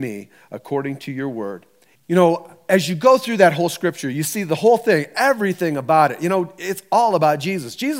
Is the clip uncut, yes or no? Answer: no